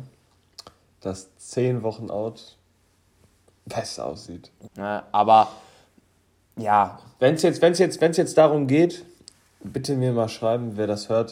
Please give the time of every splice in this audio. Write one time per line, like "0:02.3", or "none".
0:04.6